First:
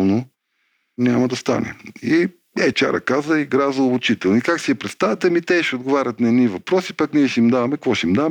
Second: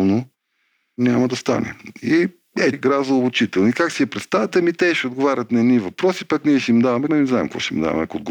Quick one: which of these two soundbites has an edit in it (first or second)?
second